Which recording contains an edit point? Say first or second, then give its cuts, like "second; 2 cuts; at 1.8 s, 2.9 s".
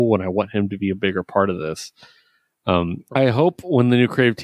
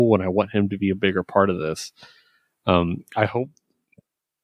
first; 1 cut; at 3.1 s